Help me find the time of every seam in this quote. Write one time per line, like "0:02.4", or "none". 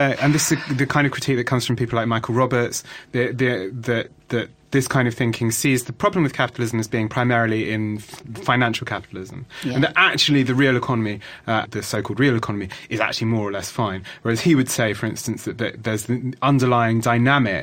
0:11.6